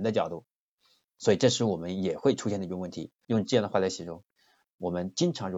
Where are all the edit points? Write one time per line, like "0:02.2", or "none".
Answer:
0:03.2